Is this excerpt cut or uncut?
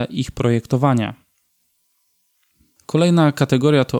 uncut